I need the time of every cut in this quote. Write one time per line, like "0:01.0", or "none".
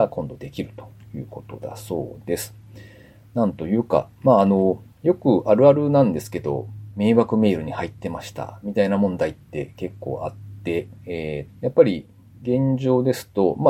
0:04.9
0:06.9
0:11.5